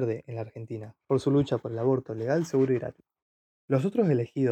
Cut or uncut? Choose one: uncut